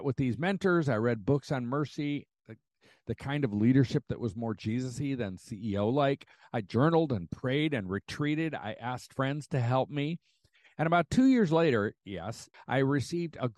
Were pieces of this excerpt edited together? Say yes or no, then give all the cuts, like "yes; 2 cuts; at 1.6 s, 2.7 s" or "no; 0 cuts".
yes; 1 cut; at 12.5 s